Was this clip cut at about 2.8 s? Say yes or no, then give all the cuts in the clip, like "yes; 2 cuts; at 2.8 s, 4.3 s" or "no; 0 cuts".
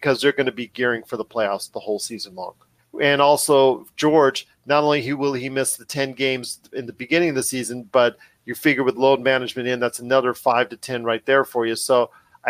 yes; 1 cut; at 2.8 s